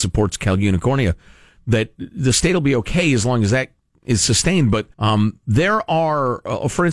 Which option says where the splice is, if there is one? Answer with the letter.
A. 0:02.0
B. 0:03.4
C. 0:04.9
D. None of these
C